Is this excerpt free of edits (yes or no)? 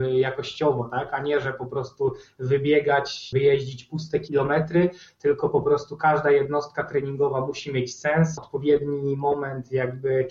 no